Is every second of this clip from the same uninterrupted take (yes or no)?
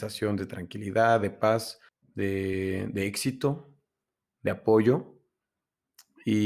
no